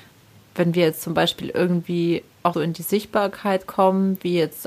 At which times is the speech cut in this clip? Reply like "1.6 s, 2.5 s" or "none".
2.5 s